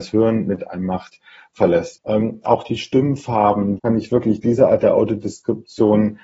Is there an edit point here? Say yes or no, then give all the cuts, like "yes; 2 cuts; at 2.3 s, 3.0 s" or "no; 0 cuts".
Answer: yes; 2 cuts; at 1.9 s, 3.8 s